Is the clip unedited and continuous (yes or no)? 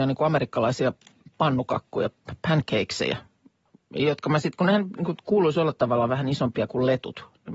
yes